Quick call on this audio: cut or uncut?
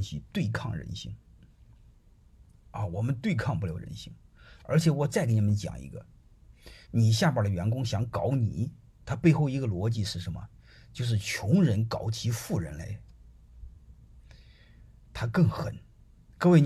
cut